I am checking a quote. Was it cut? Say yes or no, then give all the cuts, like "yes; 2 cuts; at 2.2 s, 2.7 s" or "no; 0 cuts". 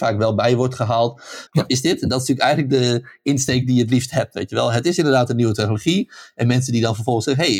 yes; 1 cut; at 1.5 s